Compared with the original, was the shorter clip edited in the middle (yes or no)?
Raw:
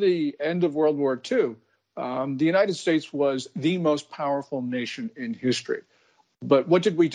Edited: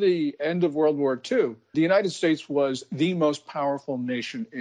yes